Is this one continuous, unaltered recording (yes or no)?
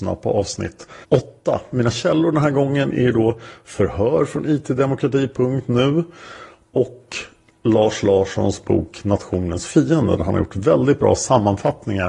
no